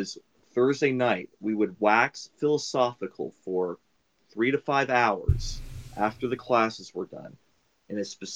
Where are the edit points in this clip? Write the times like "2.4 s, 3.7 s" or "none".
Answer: none